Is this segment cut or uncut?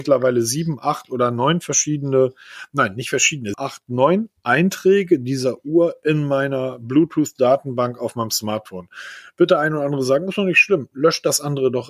cut